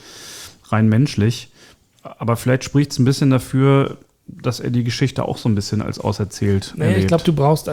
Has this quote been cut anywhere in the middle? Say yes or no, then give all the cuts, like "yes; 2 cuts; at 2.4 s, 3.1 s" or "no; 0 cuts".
no; 0 cuts